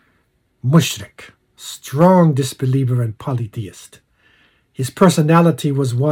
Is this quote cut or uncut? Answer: uncut